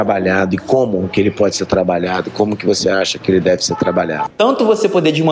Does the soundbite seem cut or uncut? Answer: cut